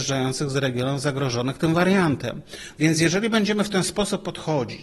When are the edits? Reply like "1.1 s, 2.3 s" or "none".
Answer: 2.8 s